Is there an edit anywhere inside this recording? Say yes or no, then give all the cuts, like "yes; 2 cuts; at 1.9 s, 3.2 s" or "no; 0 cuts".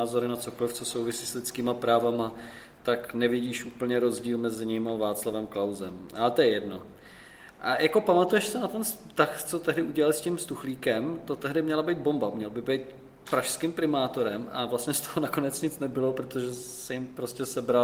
no; 0 cuts